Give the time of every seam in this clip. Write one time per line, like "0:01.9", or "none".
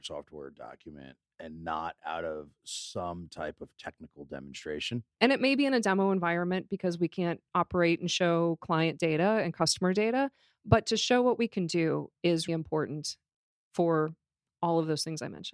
0:05.1
0:12.5

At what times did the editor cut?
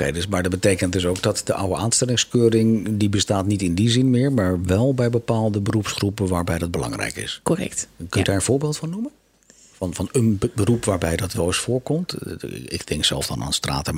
none

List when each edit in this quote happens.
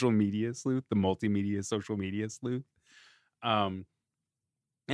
none

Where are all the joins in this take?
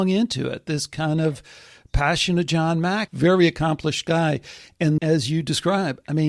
0:03.1
0:05.0

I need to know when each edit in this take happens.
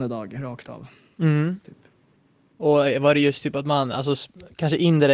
0:01.6

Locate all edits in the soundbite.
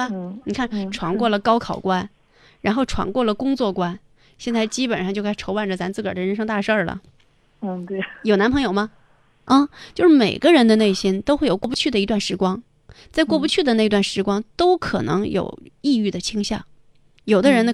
0:09.5

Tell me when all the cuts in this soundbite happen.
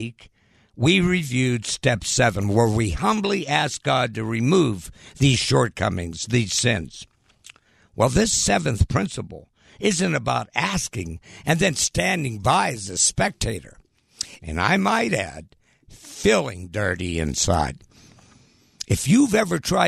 0:14.4

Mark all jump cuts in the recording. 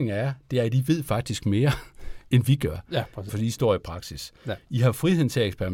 0:03.3

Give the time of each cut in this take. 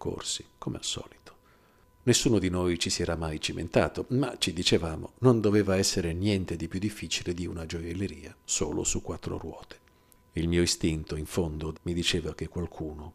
0:10.2
0:11.7

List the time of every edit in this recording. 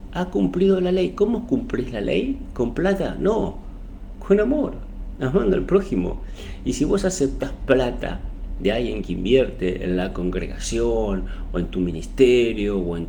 none

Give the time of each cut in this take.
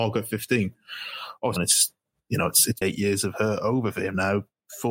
0:01.6
0:02.8

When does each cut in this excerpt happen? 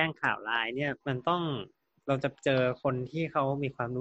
0:01.0

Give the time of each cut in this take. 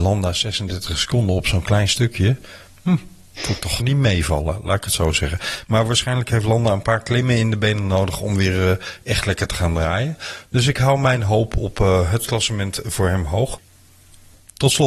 0:03.8

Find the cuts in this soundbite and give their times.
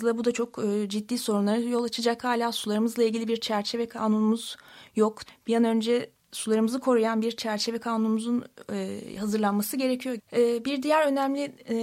0:05.3
0:10.2

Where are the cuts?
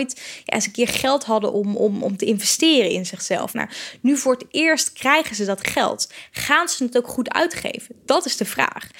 none

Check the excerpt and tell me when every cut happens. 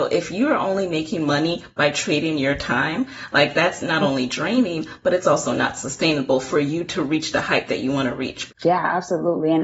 0:08.5

